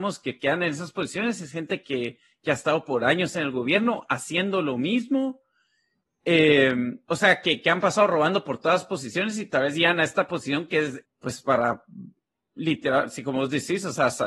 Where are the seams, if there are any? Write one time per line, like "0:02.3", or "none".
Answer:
0:11.1